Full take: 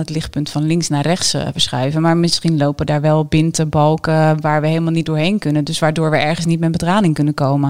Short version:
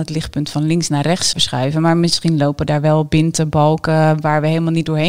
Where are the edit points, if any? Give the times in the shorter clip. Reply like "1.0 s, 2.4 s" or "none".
1.3 s

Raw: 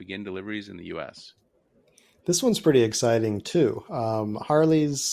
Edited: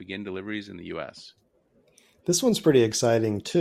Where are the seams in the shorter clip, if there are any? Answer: none

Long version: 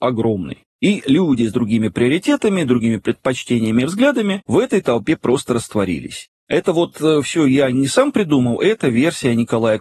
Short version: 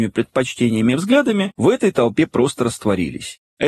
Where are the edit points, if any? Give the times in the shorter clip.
none

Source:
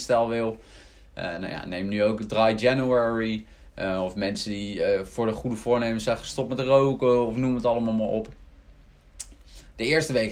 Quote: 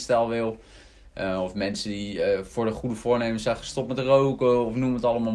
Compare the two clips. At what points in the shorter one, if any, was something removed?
1.0 s

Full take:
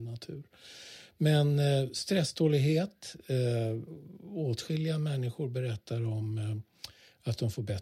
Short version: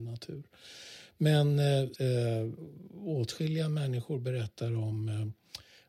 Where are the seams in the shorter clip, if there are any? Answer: 1.9 s

